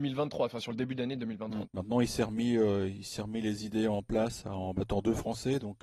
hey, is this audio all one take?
no; 1 cut; at 1.6 s

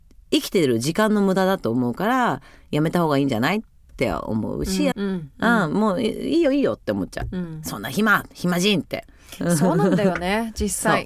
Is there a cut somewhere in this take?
yes; 1 cut; at 4.9 s

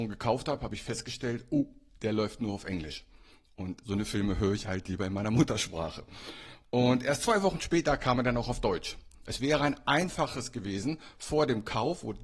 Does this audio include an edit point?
no; 0 cuts

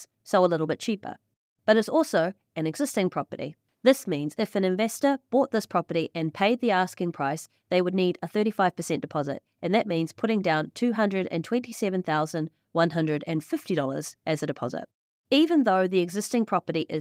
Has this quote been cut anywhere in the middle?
no; 0 cuts

